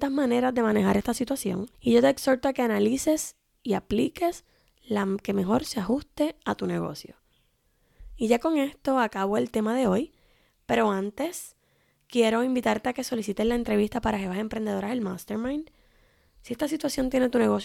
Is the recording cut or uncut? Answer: cut